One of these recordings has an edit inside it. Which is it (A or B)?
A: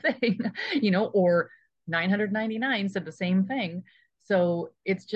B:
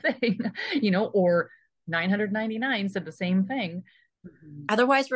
B